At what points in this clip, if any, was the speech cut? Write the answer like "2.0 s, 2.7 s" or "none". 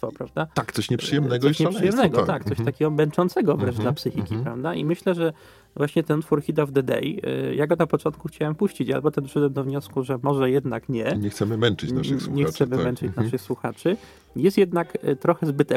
none